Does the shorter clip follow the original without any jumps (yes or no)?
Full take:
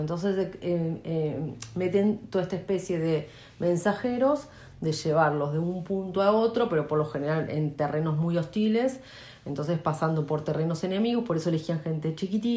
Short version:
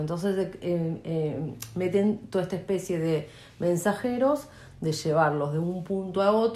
yes